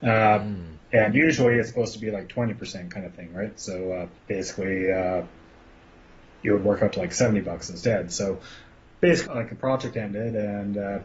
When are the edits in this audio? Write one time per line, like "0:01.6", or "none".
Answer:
0:04.2
0:09.3